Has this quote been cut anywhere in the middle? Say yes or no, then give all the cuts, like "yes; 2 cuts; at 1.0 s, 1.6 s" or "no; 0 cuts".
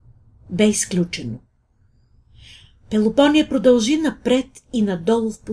no; 0 cuts